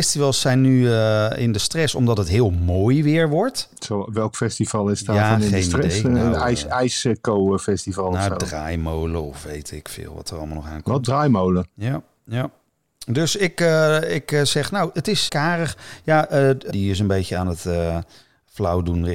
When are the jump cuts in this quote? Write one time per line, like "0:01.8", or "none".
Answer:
0:15.3
0:16.7